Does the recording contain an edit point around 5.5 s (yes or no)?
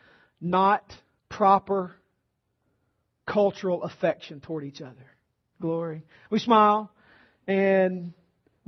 yes